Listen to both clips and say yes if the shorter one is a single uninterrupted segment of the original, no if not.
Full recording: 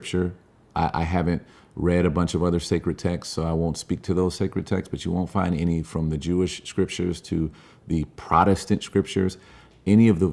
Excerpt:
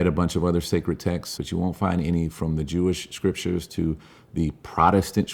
no